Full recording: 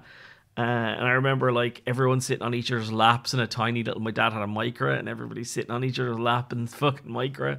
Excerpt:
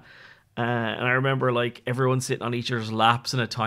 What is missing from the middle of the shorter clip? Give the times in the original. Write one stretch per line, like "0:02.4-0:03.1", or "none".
none